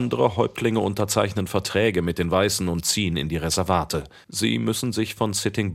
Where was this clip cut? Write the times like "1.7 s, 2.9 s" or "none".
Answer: none